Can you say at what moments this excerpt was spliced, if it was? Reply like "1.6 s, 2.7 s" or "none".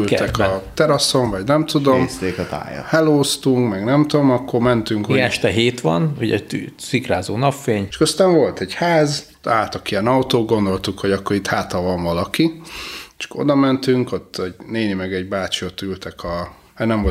7.9 s